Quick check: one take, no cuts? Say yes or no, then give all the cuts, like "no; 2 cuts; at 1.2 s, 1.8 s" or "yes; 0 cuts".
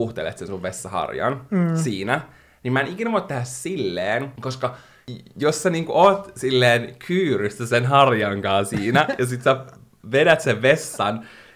yes; 0 cuts